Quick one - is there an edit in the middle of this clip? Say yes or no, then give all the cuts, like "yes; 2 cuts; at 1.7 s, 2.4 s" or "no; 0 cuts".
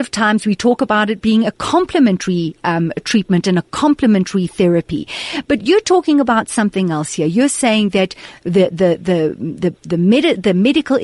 no; 0 cuts